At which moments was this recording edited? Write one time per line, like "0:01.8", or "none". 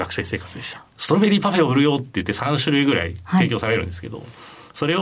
0:00.9

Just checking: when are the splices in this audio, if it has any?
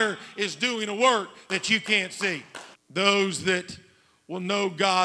0:02.7

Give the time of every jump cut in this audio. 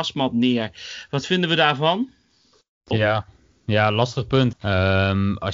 0:02.9
0:04.5

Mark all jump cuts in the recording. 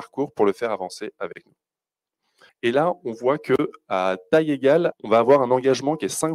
0:02.5
0:04.9

